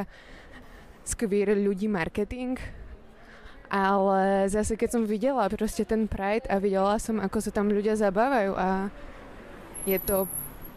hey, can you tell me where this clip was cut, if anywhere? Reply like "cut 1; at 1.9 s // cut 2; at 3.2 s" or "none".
none